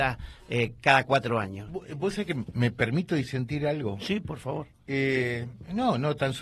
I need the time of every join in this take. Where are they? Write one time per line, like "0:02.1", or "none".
none